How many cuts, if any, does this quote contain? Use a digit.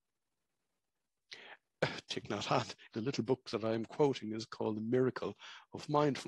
1